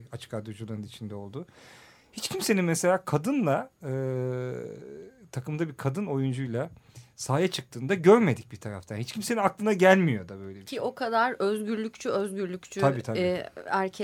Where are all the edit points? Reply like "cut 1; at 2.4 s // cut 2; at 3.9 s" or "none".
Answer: none